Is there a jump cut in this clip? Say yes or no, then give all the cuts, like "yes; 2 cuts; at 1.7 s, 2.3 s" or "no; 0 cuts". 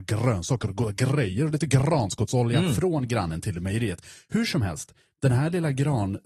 no; 0 cuts